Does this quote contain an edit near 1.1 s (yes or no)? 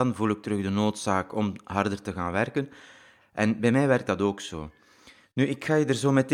no